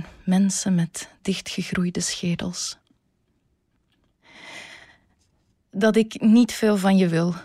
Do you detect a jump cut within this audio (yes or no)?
no